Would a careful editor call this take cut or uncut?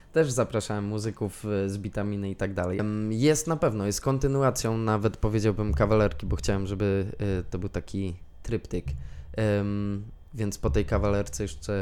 cut